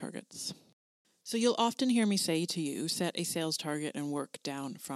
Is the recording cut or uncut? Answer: uncut